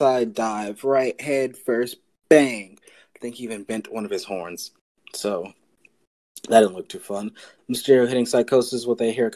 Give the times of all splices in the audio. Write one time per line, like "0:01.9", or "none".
0:07.6